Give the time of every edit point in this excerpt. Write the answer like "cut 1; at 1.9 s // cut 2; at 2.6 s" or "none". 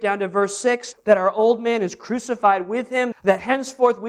cut 1; at 0.9 s // cut 2; at 3.1 s